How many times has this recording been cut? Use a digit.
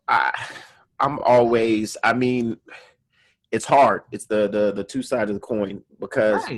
0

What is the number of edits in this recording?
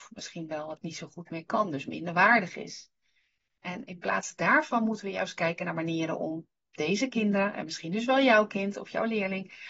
0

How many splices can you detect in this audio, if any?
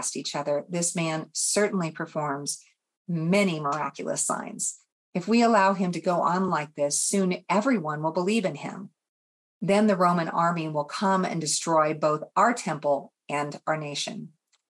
0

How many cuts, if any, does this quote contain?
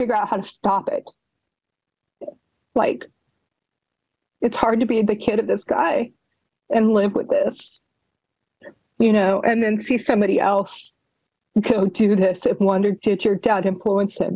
0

